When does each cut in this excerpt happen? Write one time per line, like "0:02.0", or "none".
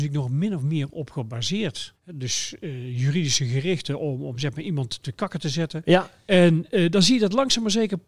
0:01.9